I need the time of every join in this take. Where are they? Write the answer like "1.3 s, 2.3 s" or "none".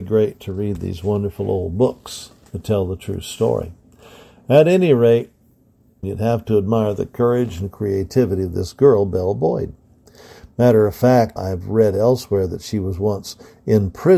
6.0 s, 11.4 s